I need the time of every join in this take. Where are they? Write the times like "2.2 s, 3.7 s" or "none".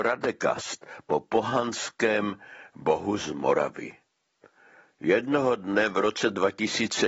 none